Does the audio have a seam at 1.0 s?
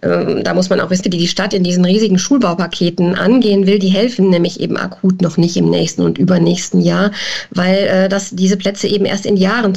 yes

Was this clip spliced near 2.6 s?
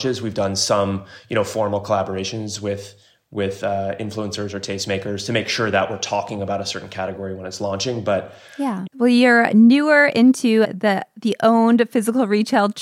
no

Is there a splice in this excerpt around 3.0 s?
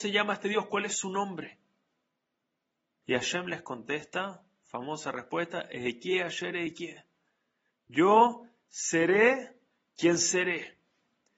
yes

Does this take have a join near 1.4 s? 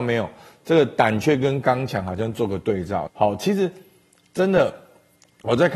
no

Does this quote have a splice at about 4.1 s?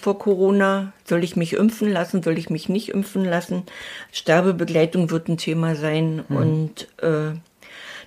yes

